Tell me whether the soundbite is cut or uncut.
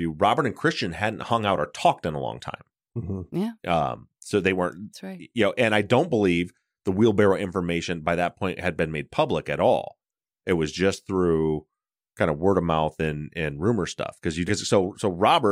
cut